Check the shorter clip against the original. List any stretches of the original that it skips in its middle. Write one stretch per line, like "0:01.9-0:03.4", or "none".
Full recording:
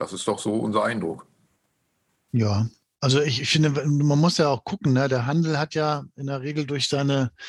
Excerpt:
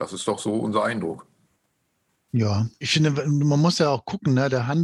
0:02.8-0:03.4